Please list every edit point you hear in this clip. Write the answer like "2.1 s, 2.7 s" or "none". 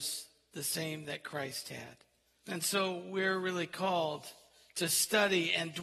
2.4 s

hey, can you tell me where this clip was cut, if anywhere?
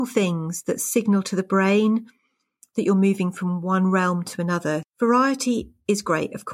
4.8 s

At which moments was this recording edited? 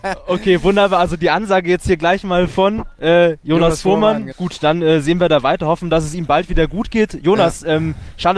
4.3 s

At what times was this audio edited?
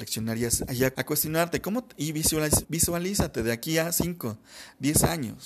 0.9 s, 2.6 s

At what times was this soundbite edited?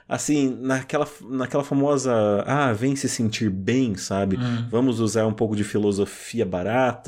none

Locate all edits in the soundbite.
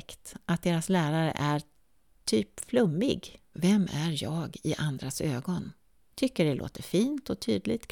3.5 s, 6.1 s

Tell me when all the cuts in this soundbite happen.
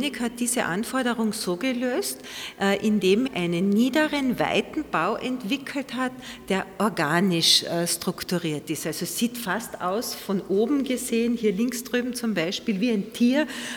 3.3 s

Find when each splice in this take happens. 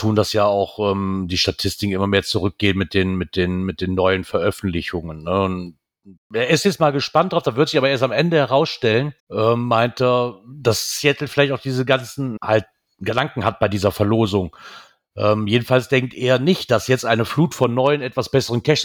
6.2 s, 9.2 s, 12.4 s

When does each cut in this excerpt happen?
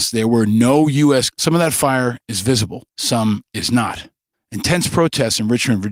1.3 s, 2.9 s, 4.3 s

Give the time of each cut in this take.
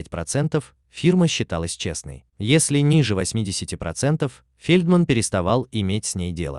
2.3 s

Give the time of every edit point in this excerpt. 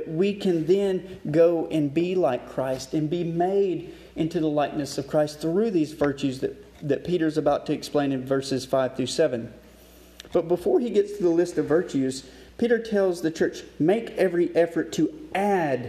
none

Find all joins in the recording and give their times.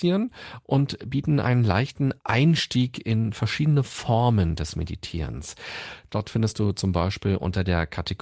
6.0 s

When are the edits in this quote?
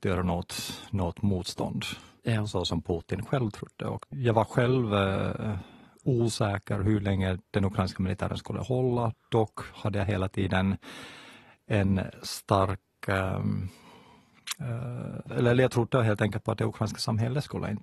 2.2 s

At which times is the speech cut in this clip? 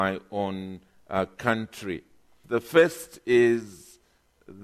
2.4 s

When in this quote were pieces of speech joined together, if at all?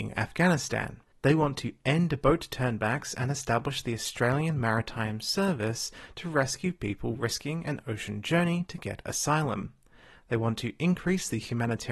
1.1 s

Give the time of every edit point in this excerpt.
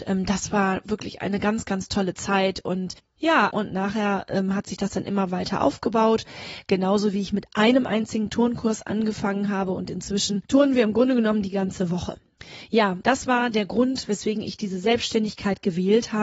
3.5 s

